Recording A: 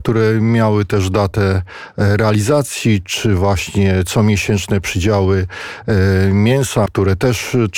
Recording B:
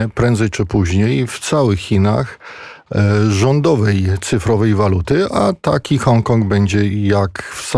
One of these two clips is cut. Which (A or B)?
A